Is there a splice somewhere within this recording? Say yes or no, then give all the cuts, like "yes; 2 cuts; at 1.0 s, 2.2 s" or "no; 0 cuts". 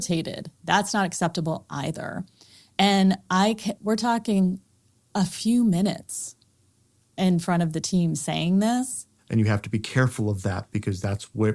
yes; 2 cuts; at 3.8 s, 9.2 s